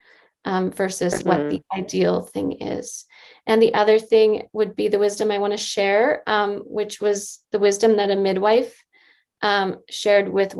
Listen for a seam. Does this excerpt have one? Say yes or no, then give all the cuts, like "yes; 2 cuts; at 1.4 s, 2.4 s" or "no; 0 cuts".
no; 0 cuts